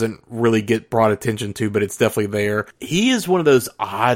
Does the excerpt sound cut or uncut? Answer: uncut